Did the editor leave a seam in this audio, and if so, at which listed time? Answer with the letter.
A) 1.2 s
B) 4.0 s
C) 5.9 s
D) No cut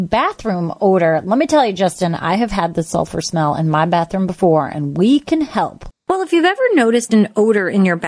C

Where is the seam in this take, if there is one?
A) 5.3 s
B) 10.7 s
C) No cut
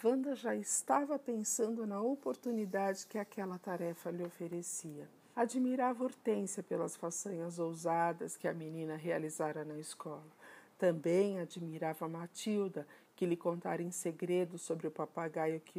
A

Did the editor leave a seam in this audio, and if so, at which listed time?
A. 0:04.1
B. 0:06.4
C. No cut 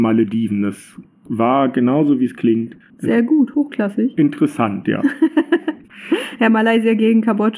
C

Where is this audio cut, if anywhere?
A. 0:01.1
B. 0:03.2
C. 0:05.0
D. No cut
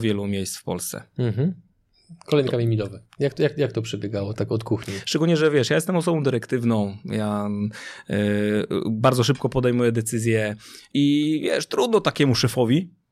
B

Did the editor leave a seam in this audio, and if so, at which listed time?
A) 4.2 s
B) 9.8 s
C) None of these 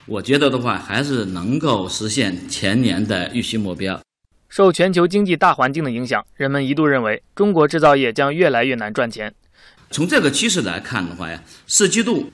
B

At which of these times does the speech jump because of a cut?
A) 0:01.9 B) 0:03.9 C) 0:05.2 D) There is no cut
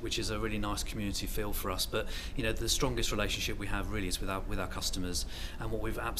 D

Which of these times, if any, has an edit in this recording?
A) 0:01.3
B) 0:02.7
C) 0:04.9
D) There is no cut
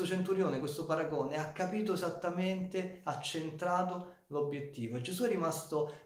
D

